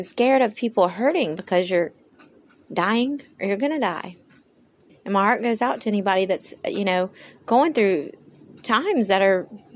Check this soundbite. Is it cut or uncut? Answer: cut